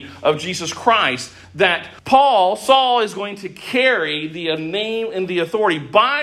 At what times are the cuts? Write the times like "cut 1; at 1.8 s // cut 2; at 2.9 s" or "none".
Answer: cut 1; at 2.0 s